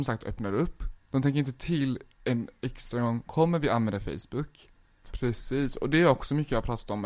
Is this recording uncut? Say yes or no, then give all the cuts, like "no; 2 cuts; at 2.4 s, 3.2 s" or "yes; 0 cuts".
no; 1 cut; at 5.0 s